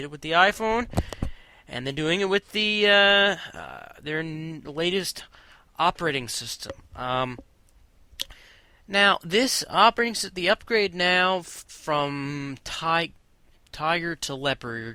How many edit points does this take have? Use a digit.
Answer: 0